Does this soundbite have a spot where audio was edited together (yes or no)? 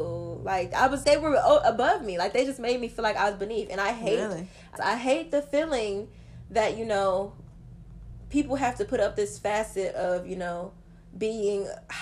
yes